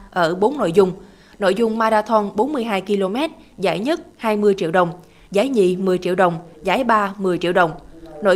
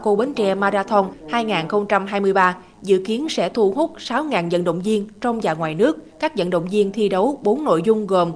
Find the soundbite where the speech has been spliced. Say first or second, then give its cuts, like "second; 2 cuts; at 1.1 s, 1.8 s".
second; 1 cut; at 6.1 s